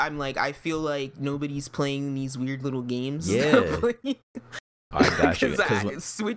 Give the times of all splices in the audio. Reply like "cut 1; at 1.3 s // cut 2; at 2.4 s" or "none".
cut 1; at 4.9 s